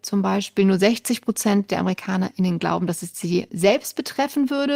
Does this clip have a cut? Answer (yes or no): yes